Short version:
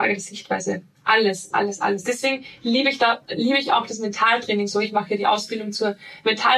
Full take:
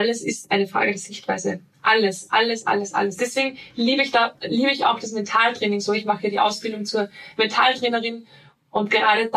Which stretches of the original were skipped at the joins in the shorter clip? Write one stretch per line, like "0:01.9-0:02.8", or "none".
0:02.3-0:02.6

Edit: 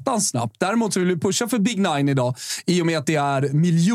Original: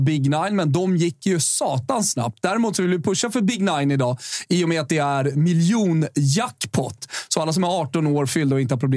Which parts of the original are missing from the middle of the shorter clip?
none

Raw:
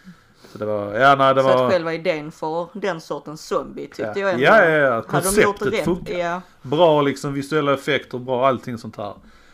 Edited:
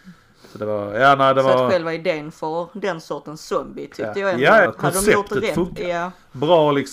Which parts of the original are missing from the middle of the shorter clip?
0:04.7-0:05.0

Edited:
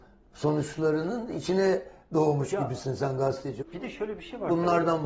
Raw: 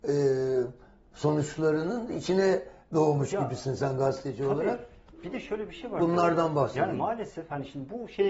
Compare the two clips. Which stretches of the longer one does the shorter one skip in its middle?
0:04.4-0:05.1

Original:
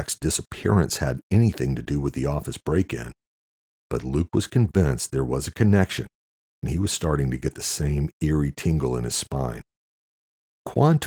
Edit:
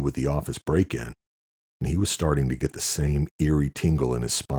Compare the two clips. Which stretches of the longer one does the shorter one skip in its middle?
0:03.6-0:06.5

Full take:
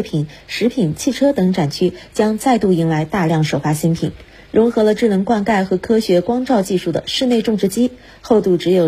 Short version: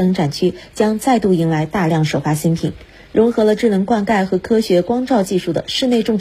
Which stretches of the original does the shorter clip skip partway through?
none

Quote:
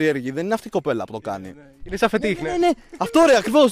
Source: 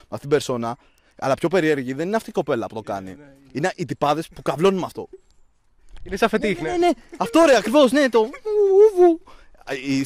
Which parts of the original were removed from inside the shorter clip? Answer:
0:03.4-0:06.0

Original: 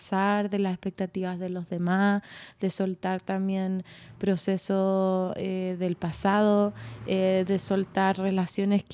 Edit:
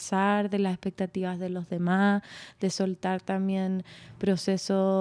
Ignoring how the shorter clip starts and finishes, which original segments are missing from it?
none

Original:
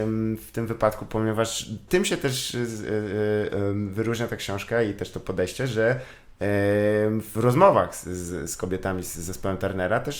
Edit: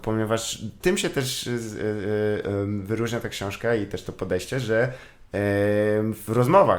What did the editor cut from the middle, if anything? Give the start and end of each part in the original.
none

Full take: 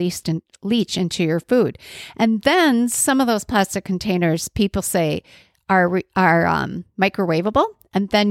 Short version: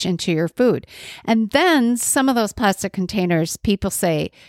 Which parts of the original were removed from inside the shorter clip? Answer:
none

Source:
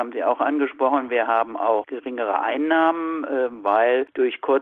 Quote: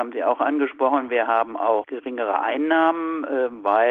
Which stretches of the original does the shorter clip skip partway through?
none

